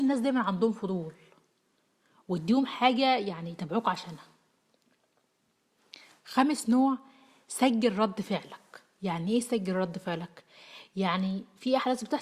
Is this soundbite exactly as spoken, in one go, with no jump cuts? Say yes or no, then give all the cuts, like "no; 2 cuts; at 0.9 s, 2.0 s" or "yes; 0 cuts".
yes; 0 cuts